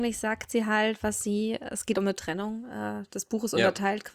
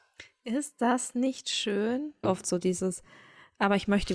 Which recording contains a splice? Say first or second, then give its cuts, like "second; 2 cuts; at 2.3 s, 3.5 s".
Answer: second; 1 cut; at 2.2 s